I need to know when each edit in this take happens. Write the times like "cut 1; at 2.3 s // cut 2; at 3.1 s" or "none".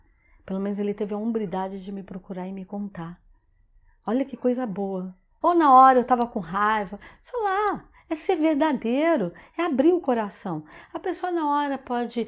cut 1; at 5.4 s